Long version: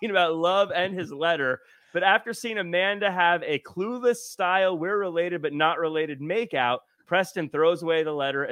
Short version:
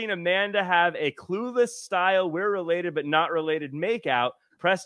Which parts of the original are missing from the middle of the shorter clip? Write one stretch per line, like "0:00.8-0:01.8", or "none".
none